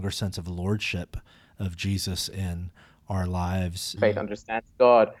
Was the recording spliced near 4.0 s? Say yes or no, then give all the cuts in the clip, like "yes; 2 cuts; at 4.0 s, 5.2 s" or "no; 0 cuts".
yes; 1 cut; at 4.0 s